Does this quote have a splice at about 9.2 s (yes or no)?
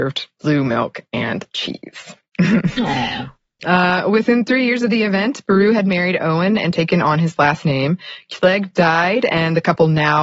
no